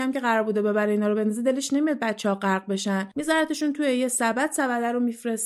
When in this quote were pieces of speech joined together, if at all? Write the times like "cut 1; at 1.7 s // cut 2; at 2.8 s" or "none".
none